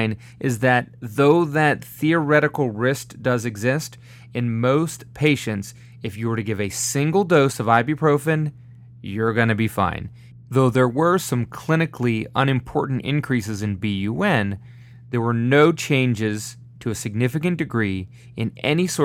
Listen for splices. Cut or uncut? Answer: cut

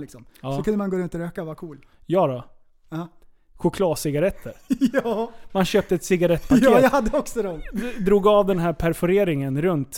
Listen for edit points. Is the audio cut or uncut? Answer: uncut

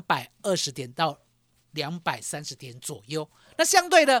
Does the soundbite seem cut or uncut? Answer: uncut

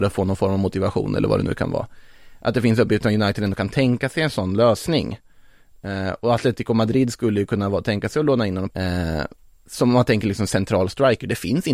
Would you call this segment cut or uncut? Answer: cut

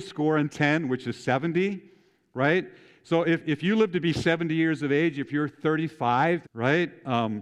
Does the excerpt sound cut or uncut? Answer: cut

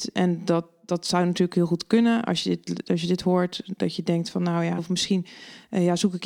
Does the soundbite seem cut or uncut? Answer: cut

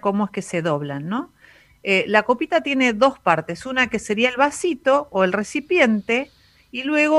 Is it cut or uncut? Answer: uncut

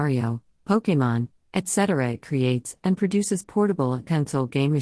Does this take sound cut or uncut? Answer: cut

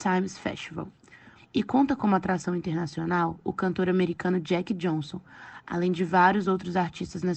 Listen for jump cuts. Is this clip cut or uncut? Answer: cut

